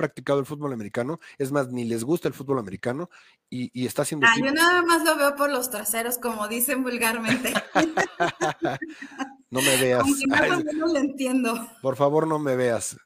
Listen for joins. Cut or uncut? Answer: uncut